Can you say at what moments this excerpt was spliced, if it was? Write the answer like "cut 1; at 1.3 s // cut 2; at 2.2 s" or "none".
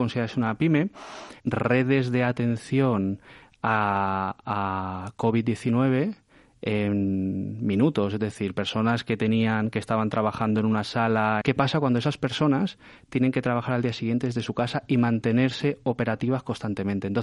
cut 1; at 1.4 s // cut 2; at 11.4 s